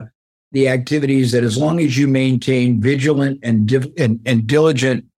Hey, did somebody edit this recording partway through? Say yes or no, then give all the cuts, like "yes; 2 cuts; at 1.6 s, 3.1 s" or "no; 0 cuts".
no; 0 cuts